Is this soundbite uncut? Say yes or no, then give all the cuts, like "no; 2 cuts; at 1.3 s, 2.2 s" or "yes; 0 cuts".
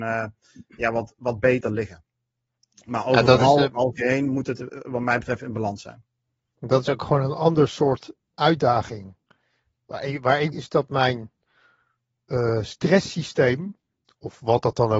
no; 2 cuts; at 8.3 s, 10.5 s